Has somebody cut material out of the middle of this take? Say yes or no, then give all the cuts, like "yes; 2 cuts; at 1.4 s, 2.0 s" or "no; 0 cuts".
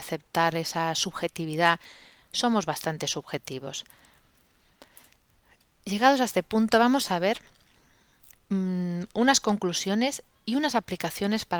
no; 0 cuts